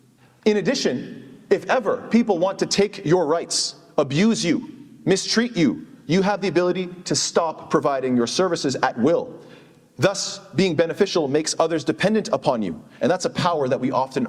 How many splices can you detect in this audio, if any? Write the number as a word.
zero